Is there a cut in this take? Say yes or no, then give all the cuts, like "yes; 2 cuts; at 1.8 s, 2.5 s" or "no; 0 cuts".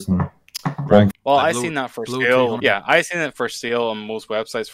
yes; 2 cuts; at 1.1 s, 2.6 s